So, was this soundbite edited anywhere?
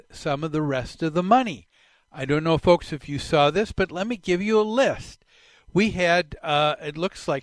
no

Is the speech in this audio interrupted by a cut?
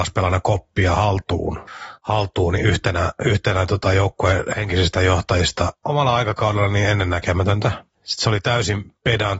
yes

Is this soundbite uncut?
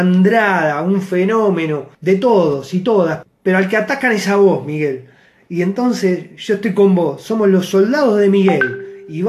no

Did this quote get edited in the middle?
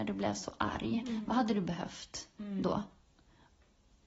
no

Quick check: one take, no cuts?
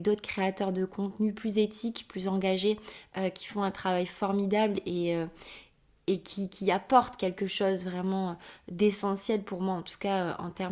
yes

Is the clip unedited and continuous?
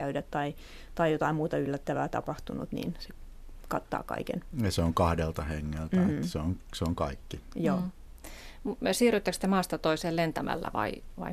yes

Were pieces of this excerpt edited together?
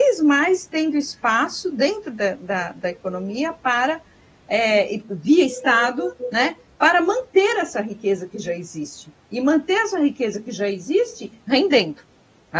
no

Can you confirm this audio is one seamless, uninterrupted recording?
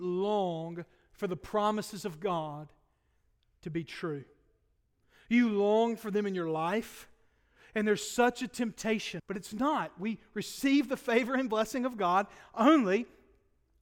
no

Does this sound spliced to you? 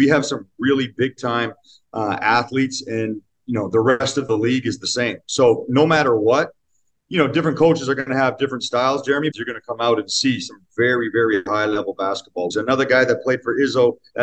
yes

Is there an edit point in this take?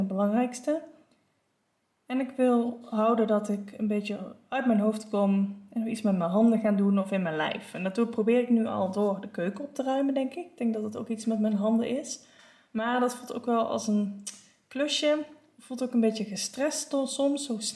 no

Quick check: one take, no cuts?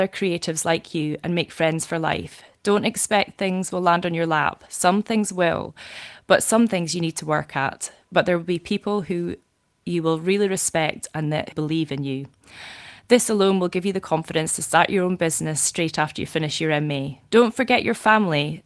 no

